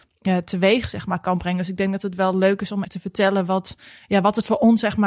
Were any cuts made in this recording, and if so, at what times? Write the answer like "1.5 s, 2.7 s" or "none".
2.8 s